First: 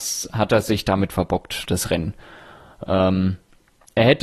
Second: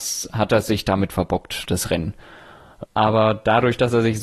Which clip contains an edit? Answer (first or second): second